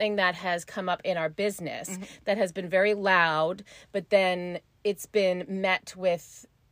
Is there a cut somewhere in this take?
no; 0 cuts

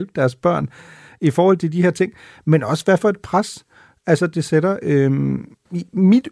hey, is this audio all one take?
yes; 0 cuts

